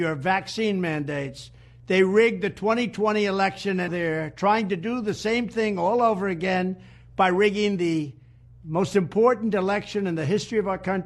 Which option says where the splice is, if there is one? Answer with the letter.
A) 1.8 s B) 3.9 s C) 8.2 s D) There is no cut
B